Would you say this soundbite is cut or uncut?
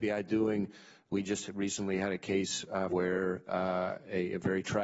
cut